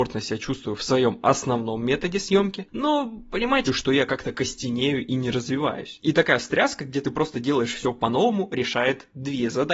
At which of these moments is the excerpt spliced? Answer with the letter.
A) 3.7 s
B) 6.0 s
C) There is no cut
A